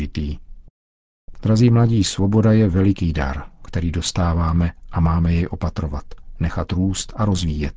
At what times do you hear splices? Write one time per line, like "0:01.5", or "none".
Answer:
0:01.3